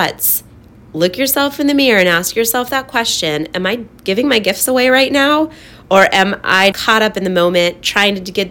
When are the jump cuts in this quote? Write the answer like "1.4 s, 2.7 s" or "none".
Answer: 6.7 s